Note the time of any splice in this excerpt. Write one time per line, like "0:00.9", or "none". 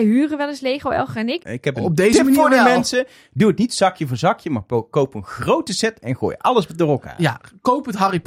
0:01.4